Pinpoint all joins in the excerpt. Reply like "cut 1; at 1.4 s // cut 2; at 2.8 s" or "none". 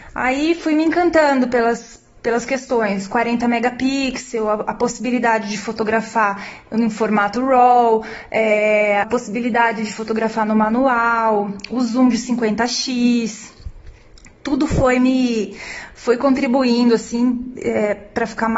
cut 1; at 9.0 s